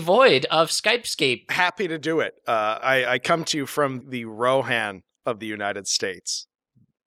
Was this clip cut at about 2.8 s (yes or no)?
yes